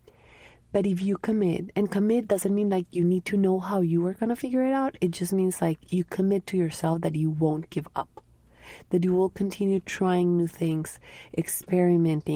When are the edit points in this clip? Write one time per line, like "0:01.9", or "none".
none